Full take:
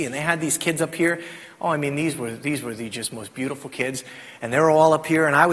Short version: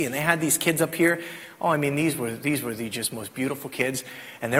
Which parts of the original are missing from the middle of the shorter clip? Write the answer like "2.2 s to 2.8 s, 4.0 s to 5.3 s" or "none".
none